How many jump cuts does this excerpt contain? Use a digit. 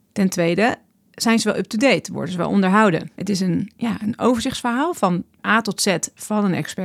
2